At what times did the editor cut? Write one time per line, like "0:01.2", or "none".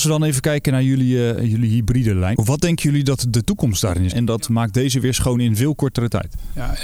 0:02.3
0:04.1